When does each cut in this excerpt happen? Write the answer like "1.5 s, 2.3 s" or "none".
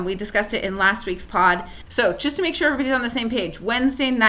1.9 s